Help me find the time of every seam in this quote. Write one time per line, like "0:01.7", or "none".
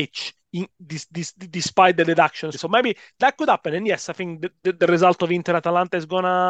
0:02.5